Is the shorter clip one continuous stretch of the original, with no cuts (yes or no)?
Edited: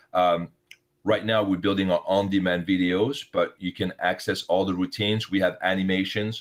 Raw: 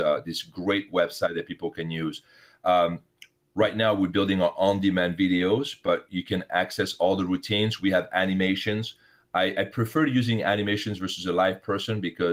yes